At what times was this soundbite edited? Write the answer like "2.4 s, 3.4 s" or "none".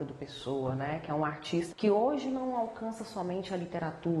1.7 s